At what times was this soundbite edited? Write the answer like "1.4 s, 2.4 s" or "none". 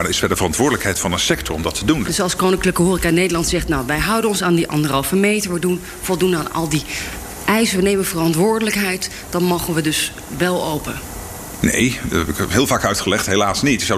2.1 s